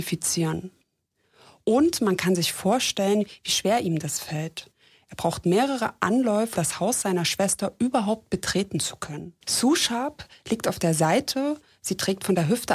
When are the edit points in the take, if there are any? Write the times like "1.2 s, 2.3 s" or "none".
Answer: 6.6 s, 9.4 s